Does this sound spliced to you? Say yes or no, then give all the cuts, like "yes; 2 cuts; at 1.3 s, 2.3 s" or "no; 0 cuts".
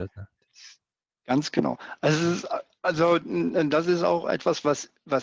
no; 0 cuts